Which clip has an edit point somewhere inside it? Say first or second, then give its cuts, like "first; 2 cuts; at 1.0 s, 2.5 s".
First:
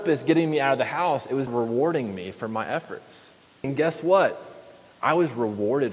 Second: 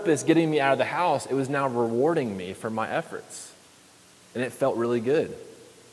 first; 2 cuts; at 1.5 s, 3.6 s